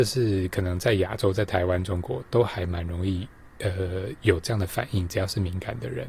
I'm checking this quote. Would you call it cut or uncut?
uncut